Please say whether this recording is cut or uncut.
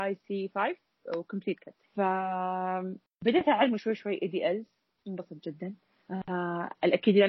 uncut